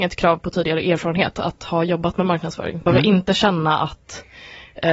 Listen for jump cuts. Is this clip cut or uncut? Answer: cut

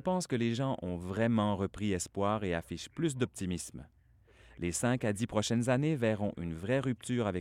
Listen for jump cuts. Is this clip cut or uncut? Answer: uncut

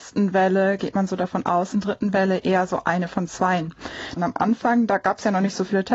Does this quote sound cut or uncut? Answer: cut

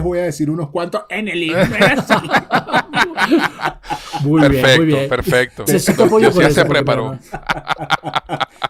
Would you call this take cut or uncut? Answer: cut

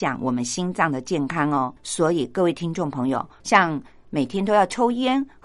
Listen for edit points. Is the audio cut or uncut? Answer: cut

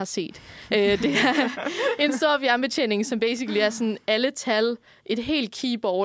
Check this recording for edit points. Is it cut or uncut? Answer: uncut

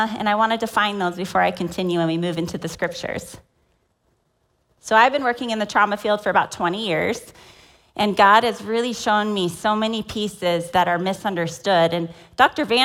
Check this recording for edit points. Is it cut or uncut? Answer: uncut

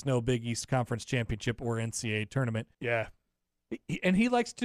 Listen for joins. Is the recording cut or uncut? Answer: cut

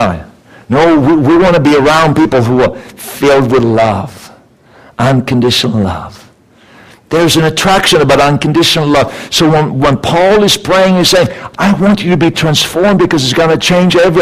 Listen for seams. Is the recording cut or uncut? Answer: uncut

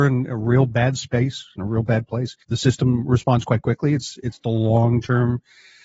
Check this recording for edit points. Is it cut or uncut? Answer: cut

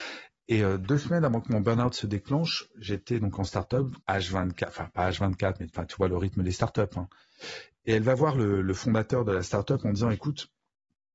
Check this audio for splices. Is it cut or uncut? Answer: cut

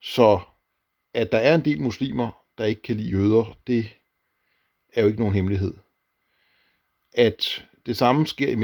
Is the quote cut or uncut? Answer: uncut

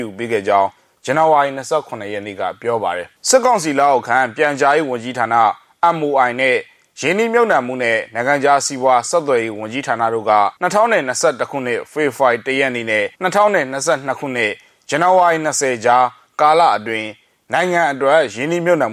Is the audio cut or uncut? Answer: cut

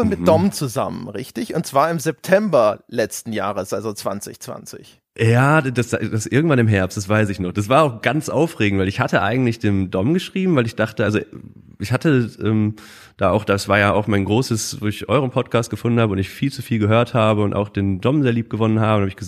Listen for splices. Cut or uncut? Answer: uncut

